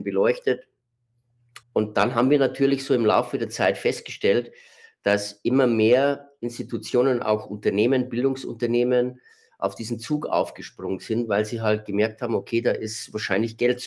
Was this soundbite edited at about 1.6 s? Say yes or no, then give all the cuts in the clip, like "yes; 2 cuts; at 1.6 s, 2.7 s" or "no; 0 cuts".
yes; 1 cut; at 1.6 s